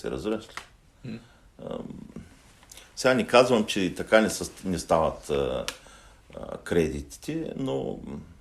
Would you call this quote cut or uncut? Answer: uncut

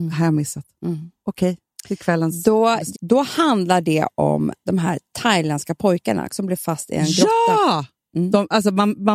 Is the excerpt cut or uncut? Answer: cut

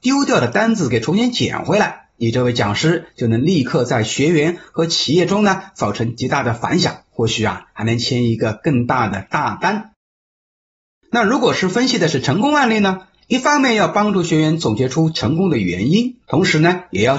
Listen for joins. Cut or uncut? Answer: cut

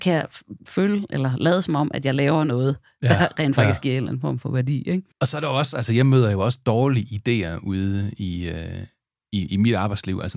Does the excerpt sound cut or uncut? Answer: cut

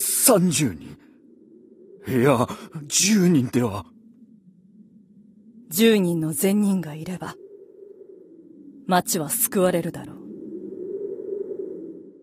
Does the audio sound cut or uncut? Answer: uncut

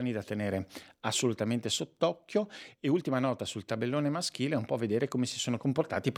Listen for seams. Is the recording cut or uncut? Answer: uncut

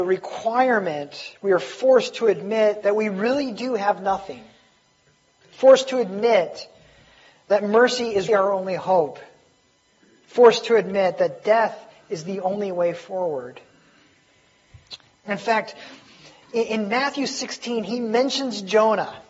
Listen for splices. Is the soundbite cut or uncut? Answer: cut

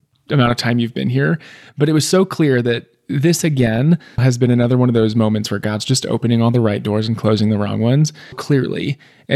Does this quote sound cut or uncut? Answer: cut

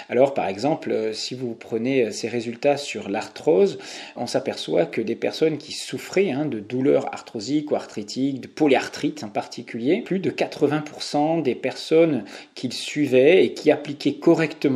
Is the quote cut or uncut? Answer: cut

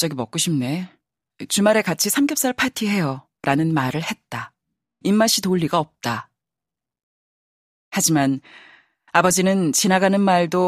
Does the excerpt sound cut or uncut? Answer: cut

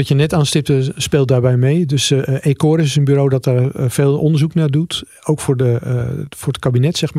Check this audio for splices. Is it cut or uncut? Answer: uncut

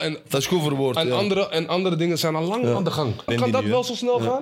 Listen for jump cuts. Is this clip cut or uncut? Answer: cut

